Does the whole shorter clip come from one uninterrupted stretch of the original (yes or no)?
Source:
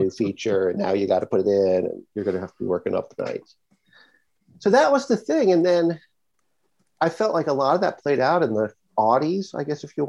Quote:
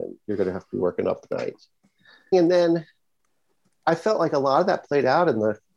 no